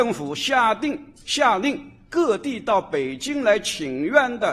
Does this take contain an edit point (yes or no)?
no